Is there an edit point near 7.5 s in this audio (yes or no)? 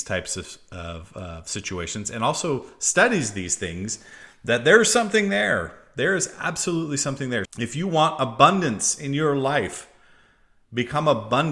yes